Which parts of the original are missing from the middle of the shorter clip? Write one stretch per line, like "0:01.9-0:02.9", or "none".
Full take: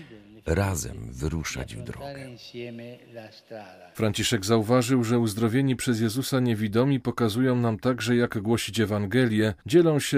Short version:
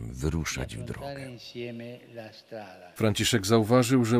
none